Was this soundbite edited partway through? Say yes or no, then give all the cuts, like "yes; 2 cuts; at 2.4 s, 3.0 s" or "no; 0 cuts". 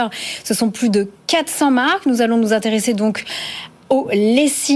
no; 0 cuts